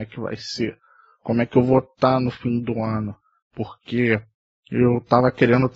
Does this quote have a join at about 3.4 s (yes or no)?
yes